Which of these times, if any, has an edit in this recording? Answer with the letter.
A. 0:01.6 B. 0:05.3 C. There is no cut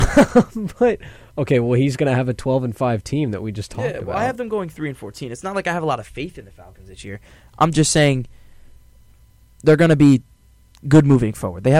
C